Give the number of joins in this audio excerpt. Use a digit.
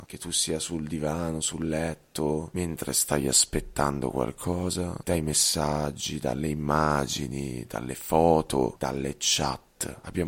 2